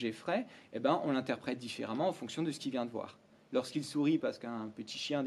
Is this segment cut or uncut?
uncut